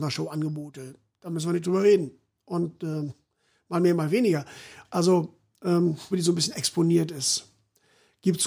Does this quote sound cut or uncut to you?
cut